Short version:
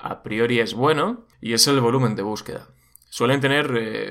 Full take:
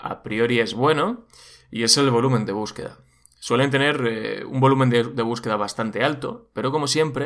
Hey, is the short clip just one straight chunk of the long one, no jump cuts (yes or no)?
no